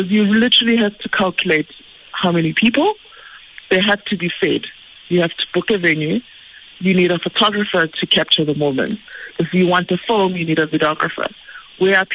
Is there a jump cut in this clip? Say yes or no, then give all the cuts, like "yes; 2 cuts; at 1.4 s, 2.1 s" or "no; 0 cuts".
no; 0 cuts